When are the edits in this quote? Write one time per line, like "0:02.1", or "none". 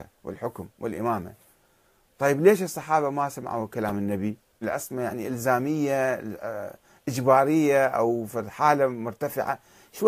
0:04.6